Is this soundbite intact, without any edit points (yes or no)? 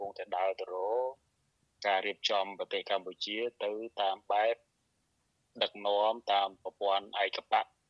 yes